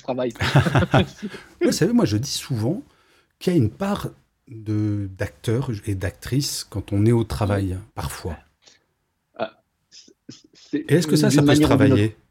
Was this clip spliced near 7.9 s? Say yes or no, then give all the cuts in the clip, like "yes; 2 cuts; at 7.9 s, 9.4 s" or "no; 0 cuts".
yes; 3 cuts; at 1.7 s, 7.9 s, 10.8 s